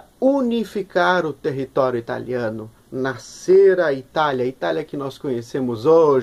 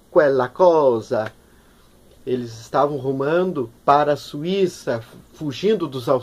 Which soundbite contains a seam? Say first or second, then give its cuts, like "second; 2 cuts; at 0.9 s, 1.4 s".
second; 2 cuts; at 2.2 s, 3.8 s